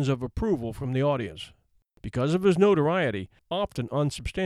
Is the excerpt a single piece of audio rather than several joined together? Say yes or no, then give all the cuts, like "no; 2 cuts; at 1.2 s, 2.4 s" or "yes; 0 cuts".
no; 2 cuts; at 1.9 s, 3.4 s